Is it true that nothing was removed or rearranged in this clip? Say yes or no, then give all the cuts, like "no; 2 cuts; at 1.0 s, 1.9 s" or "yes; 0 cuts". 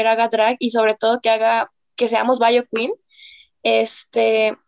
yes; 0 cuts